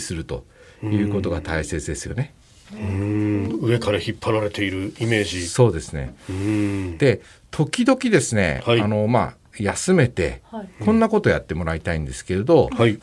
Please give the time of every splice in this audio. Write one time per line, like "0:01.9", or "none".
none